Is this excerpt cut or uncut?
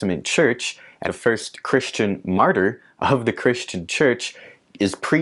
cut